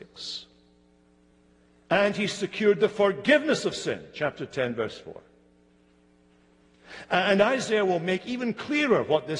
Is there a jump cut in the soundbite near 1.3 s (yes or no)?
no